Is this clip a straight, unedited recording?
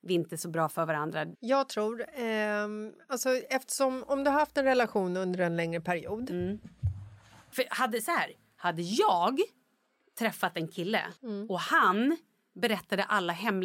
no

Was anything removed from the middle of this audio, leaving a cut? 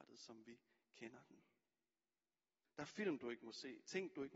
yes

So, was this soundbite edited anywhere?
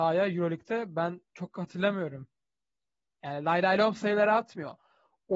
yes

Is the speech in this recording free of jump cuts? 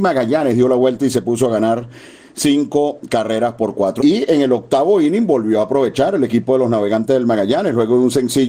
no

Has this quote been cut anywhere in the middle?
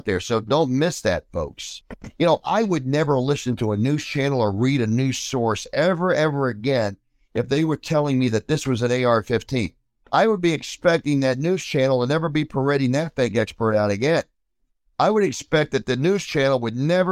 yes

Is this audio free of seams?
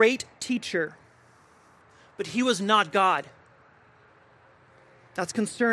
yes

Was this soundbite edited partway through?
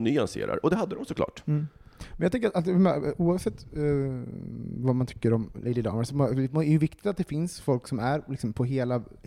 no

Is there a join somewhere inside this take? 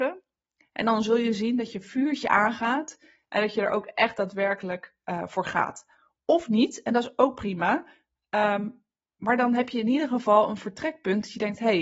no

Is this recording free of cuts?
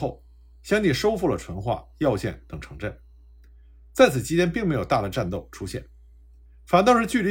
yes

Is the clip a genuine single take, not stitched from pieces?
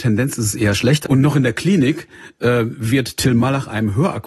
no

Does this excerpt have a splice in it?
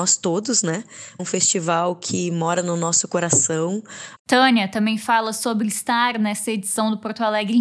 yes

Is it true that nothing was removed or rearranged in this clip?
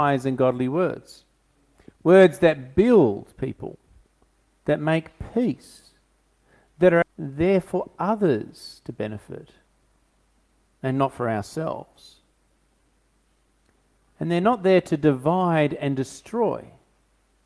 no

